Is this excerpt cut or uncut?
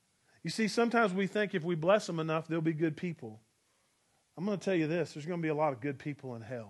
uncut